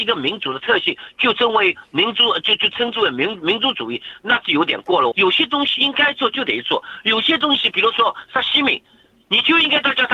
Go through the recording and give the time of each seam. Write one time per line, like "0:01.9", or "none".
0:05.1